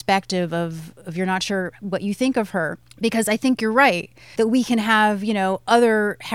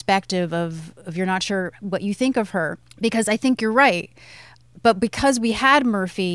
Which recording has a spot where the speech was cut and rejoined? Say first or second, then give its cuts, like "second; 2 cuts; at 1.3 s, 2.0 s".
first; 1 cut; at 4.4 s